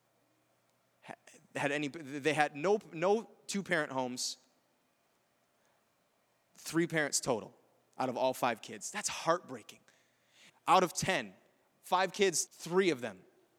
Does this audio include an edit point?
yes; 2 cuts; at 10.5 s, 12.5 s

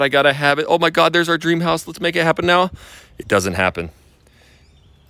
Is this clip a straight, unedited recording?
yes; 0 cuts

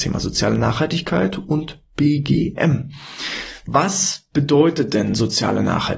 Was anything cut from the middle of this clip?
no; 0 cuts

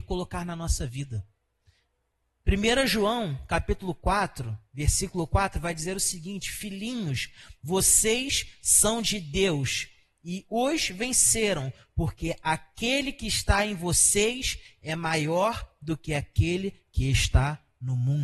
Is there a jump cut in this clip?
no; 0 cuts

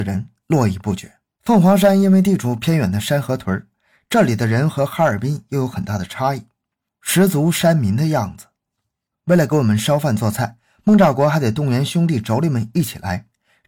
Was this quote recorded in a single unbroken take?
no; 2 cuts; at 1.4 s, 9.1 s

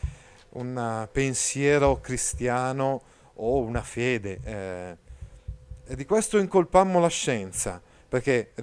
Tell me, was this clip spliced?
no; 0 cuts

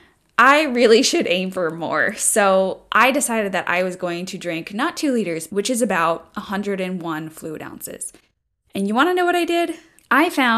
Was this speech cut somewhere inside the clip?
yes; 1 cut; at 5.5 s

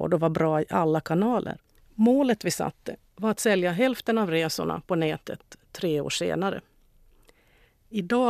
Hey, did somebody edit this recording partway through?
yes; 1 cut; at 1.8 s

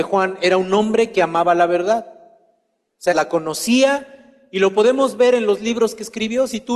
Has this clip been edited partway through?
yes; 1 cut; at 3.1 s

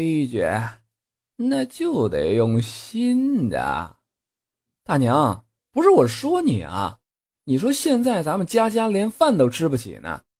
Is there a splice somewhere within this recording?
no; 0 cuts

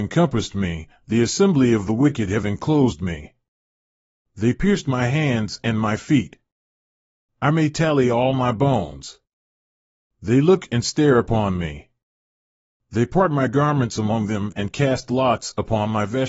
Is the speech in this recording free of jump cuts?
yes; 0 cuts

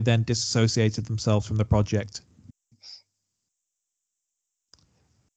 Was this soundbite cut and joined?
yes; 1 cut; at 2.7 s

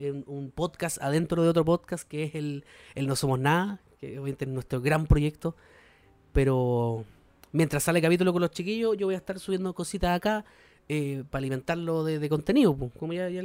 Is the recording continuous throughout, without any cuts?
yes; 0 cuts

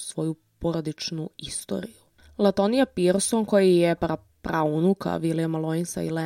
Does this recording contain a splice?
yes; 1 cut; at 4.0 s

